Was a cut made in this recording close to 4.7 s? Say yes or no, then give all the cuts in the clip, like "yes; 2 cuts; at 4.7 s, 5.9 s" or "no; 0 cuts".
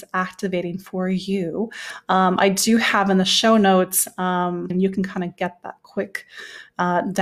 yes; 1 cut; at 4.7 s